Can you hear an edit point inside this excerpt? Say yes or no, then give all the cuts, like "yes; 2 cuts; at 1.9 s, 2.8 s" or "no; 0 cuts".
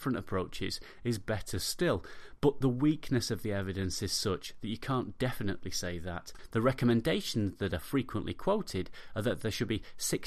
no; 0 cuts